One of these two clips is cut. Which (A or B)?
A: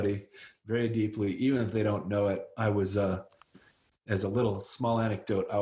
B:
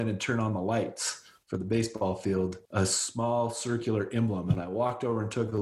B